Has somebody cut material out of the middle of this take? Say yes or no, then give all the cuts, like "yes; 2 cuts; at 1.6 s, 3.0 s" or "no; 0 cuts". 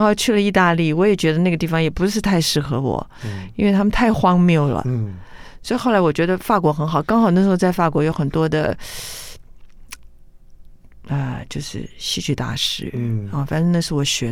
no; 0 cuts